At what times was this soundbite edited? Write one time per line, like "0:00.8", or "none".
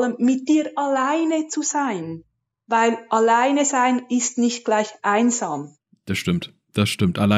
none